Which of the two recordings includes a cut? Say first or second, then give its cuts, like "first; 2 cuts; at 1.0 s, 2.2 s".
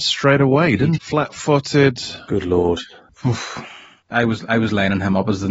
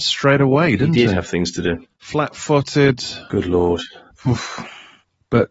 first; 2 cuts; at 1.0 s, 4.1 s